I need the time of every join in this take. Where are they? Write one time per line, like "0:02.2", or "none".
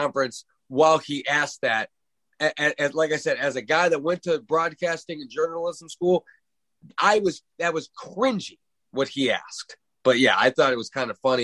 none